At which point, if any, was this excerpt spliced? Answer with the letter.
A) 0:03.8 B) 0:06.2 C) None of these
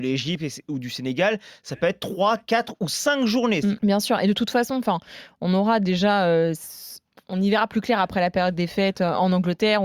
A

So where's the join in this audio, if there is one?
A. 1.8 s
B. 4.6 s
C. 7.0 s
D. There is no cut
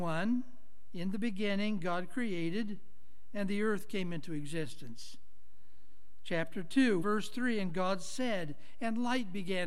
C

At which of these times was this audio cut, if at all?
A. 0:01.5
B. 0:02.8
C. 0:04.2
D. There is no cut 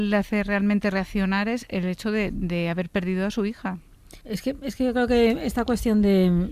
C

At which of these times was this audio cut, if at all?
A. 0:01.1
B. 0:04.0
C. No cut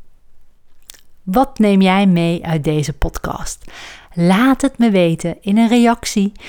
C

